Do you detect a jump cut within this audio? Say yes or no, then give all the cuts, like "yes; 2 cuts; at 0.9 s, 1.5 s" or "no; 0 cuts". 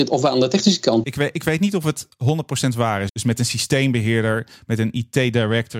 yes; 2 cuts; at 1.0 s, 3.1 s